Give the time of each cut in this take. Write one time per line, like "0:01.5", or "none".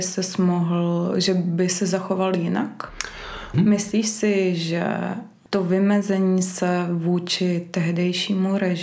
0:03.5
0:05.5